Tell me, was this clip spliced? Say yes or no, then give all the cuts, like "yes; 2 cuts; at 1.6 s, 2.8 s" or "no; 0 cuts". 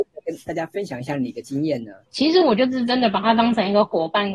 yes; 1 cut; at 2.1 s